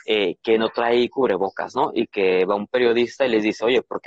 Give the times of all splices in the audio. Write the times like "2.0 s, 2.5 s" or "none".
none